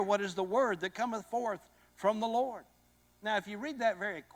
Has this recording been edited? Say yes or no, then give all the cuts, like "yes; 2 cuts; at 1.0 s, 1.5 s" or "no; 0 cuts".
no; 0 cuts